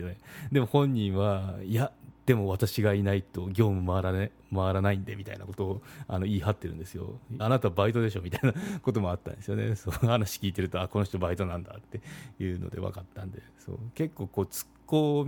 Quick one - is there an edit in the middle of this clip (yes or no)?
yes